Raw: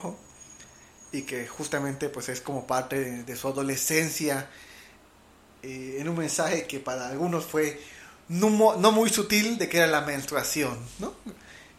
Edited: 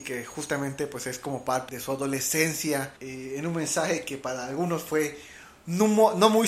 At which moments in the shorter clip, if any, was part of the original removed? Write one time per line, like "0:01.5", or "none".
0:01.7
0:03.0